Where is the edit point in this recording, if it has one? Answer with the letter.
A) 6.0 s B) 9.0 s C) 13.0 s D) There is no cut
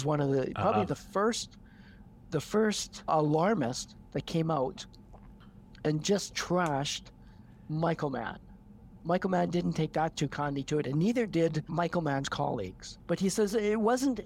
C